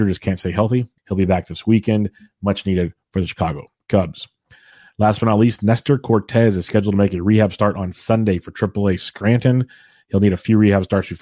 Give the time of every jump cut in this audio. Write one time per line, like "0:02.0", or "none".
0:01.0